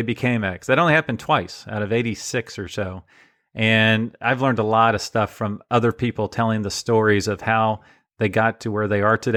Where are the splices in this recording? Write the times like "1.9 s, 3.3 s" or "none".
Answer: none